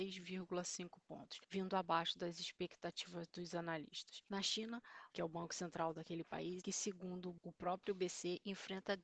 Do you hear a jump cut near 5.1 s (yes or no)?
yes